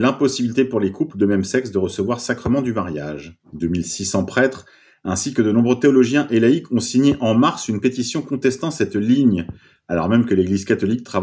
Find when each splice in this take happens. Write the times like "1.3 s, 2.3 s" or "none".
none